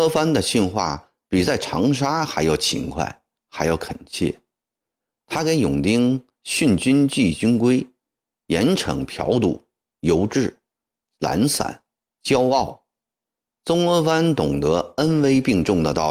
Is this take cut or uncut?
uncut